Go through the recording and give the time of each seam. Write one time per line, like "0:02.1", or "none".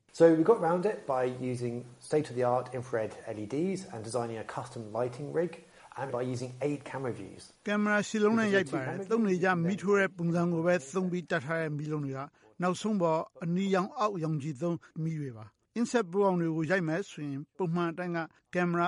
0:06.1
0:07.6